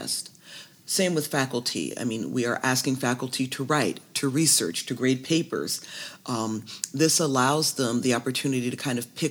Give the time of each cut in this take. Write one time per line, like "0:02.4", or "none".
none